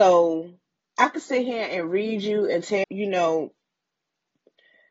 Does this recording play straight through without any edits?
no; 1 cut; at 2.8 s

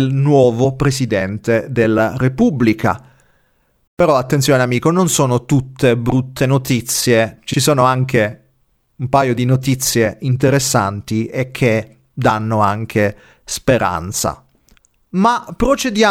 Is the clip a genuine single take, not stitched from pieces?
no; 1 cut; at 3.9 s

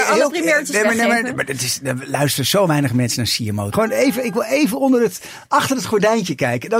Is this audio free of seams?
no; 1 cut; at 3.7 s

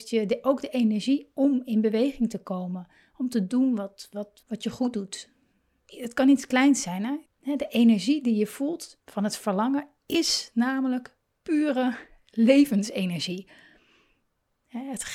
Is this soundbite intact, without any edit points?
no; 3 cuts; at 4.4 s, 7.3 s, 9.0 s

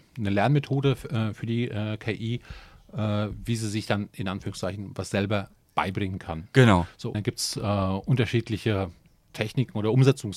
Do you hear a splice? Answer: yes; 1 cut; at 7.1 s

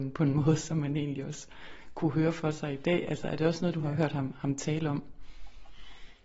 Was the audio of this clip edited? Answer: no; 0 cuts

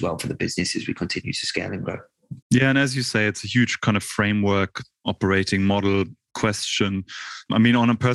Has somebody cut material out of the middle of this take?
yes; 1 cut; at 2.4 s

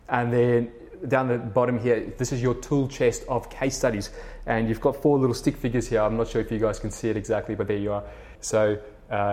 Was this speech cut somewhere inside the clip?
yes; 1 cut; at 8.4 s

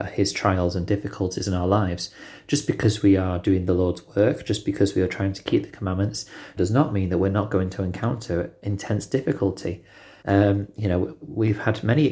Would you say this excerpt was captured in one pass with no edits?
no; 2 cuts; at 6.6 s, 10.2 s

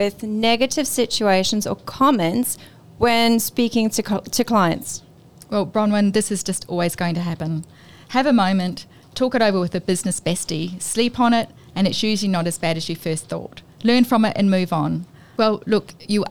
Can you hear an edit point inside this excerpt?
yes; 2 cuts; at 13.7 s, 15.3 s

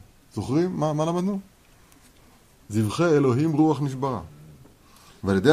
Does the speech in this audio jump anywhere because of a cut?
no; 0 cuts

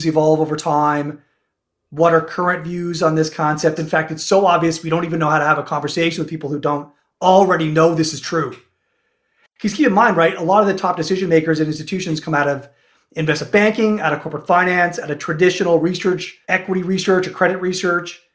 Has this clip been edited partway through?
yes; 3 cuts; at 3.8 s, 9.4 s, 16.4 s

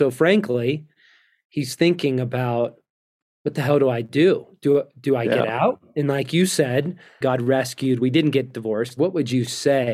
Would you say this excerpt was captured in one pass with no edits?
no; 2 cuts; at 7.2 s, 9.0 s

